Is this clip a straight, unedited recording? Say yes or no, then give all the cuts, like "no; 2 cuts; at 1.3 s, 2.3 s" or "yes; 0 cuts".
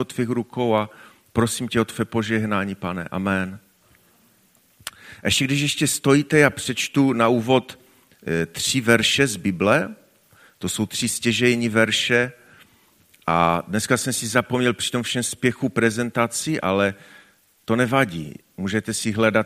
yes; 0 cuts